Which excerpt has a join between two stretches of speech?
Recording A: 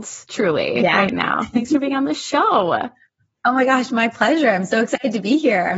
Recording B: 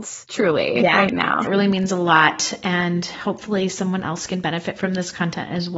B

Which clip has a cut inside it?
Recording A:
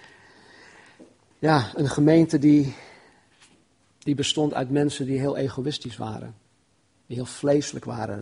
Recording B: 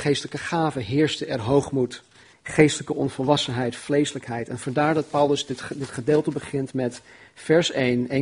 B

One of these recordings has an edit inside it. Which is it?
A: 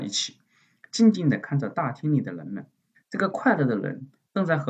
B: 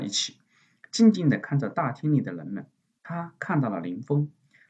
A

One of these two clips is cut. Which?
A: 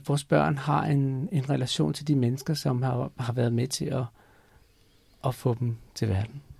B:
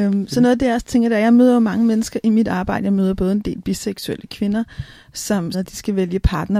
B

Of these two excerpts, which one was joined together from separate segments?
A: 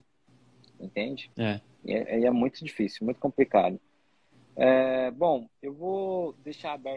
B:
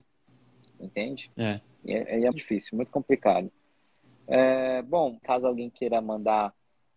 B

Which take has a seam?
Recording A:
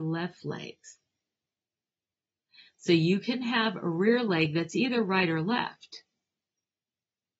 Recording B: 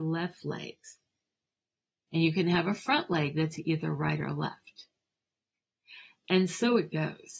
B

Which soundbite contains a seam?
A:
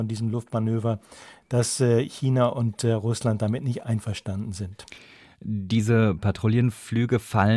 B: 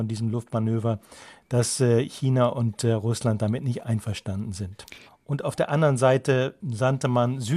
B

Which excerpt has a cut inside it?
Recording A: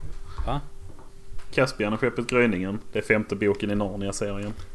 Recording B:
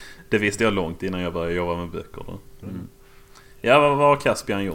B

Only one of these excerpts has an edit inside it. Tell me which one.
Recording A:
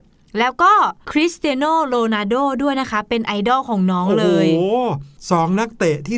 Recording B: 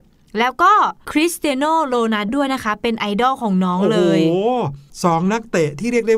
B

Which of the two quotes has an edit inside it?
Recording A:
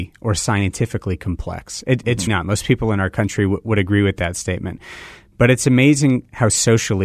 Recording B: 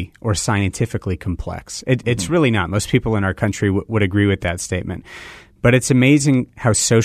A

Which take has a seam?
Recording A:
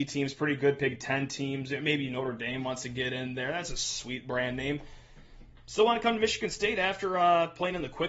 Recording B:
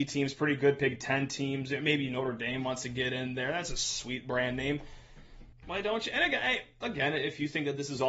B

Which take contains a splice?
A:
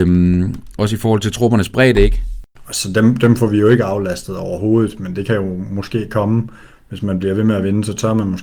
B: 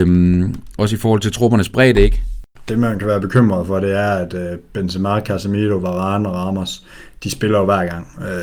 A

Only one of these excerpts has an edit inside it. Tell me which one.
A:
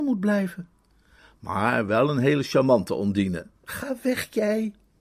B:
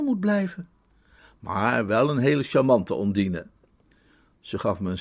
A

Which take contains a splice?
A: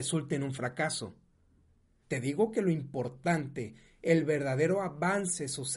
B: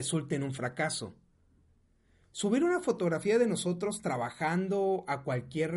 A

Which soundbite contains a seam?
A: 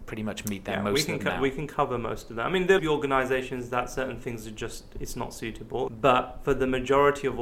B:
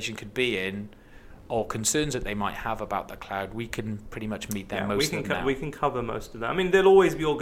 A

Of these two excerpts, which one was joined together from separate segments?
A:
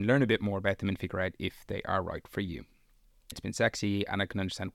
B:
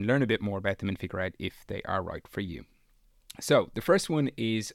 A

